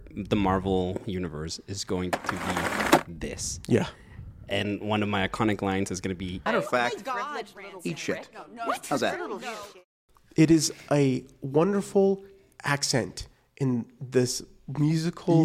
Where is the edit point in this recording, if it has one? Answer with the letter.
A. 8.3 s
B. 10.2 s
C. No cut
C